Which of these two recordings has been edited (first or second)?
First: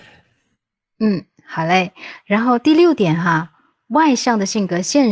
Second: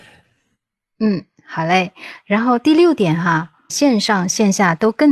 second